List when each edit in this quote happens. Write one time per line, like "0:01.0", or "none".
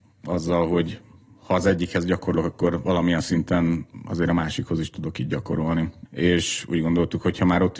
0:06.1